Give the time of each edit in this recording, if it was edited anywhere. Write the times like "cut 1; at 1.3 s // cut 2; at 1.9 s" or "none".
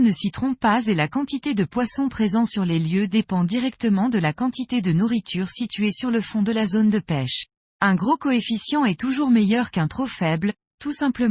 cut 1; at 7.6 s